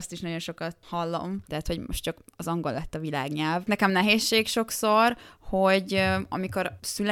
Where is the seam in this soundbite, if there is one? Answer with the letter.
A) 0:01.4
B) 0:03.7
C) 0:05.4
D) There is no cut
A